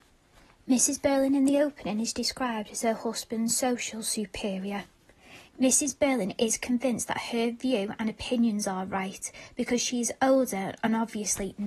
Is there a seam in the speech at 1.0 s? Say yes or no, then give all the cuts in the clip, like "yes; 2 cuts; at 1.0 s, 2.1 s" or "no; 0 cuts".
no; 1 cut; at 5.5 s